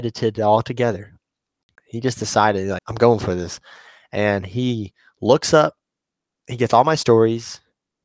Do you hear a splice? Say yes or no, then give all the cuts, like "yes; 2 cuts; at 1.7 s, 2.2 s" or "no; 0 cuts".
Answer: yes; 1 cut; at 2.8 s